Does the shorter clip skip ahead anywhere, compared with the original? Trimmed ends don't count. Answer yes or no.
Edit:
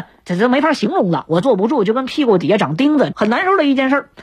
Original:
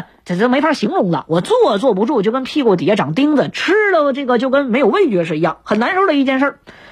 yes